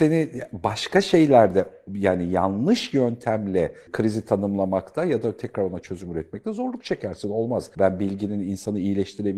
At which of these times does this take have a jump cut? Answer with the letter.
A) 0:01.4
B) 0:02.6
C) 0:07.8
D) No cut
C